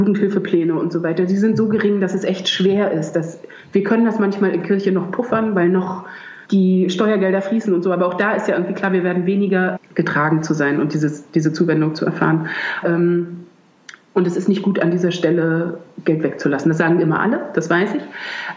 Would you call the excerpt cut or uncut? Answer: cut